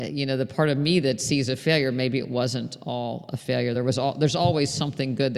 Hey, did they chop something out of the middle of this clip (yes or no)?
no